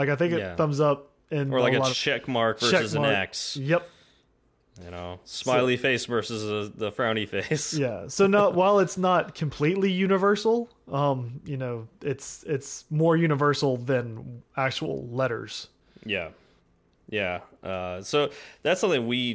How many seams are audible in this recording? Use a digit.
1